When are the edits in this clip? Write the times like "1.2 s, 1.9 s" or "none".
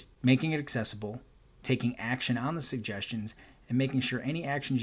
none